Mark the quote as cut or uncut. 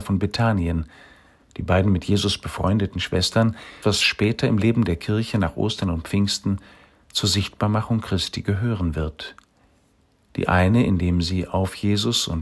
cut